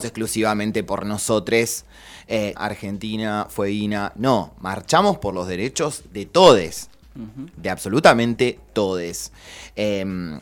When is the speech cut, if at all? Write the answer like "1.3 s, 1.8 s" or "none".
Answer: 2.6 s